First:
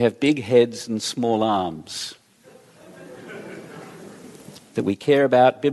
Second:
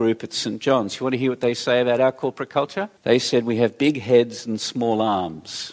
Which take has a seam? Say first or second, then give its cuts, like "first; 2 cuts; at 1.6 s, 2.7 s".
second; 1 cut; at 3.0 s